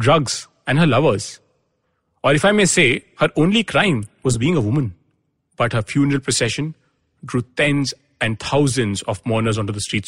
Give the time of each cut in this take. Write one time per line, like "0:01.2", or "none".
0:05.5